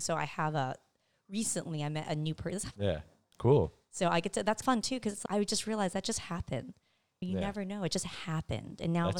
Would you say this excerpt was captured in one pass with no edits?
no; 1 cut; at 2.7 s

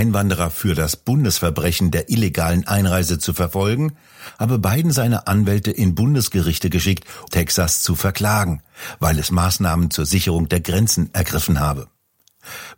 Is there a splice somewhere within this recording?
yes; 1 cut; at 7.3 s

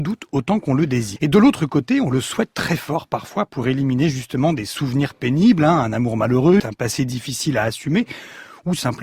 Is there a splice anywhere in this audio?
yes; 2 cuts; at 1.2 s, 6.6 s

